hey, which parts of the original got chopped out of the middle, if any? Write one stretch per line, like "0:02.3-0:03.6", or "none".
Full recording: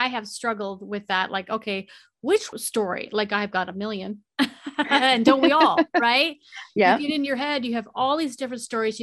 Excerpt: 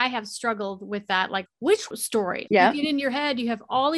0:01.5-0:02.1
0:03.1-0:06.7